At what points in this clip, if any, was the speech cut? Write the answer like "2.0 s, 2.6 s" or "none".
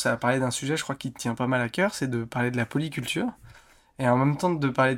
none